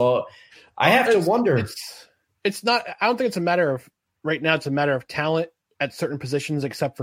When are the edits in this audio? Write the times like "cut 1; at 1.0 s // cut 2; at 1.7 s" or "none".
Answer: none

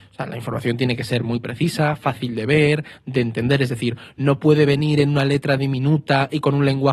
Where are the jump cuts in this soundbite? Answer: none

